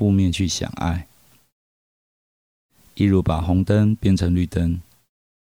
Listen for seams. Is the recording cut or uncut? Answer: uncut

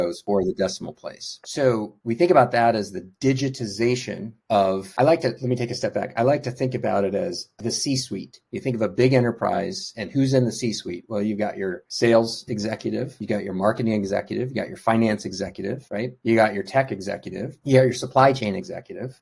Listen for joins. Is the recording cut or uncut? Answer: cut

